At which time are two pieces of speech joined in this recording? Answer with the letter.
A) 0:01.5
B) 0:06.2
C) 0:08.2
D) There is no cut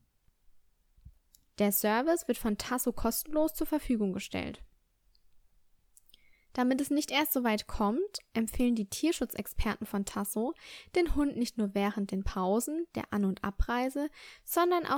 A